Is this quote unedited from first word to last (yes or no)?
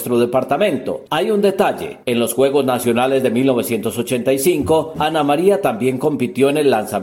no